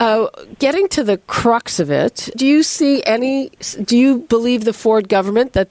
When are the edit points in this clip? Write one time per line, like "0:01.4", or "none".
0:02.3